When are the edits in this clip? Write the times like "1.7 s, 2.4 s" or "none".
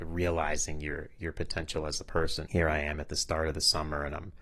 2.5 s